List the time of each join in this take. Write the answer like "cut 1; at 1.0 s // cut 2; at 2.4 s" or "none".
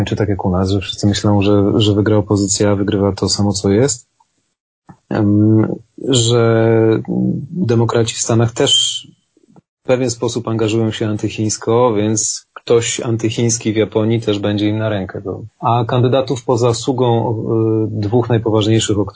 cut 1; at 15.5 s